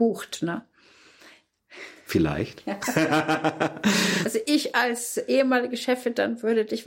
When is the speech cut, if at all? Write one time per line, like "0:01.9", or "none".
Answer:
none